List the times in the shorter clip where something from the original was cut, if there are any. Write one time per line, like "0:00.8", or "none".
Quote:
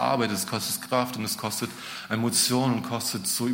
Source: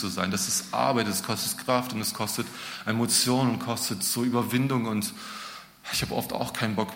none

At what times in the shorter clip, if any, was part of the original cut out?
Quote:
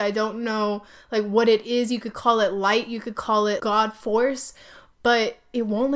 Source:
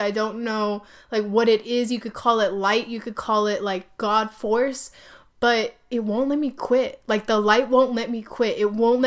0:03.6

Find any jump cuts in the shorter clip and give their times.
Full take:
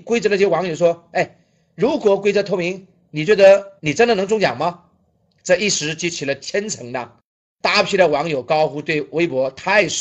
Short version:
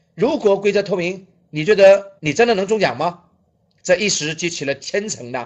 none

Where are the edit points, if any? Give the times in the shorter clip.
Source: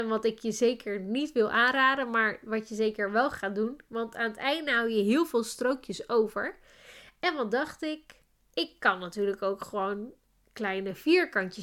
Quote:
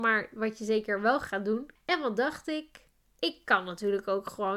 0:01.8

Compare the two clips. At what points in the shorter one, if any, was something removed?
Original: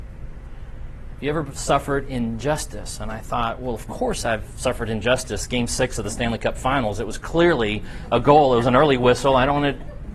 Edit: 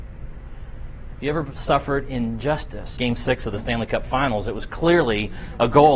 0:03.0

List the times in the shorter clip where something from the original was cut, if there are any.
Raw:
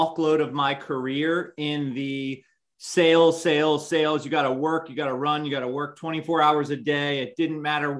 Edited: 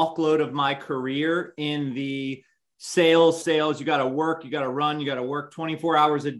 0:03.4

